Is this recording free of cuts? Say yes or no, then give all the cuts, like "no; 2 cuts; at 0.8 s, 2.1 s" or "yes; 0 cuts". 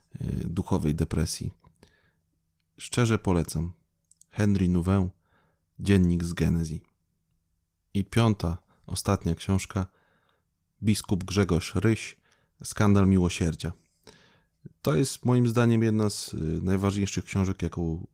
yes; 0 cuts